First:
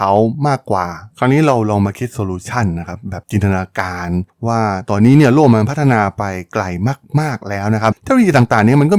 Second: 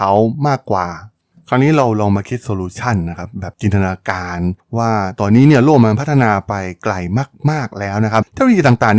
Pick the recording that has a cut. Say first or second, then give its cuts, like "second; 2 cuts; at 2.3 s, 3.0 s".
first; 1 cut; at 1.1 s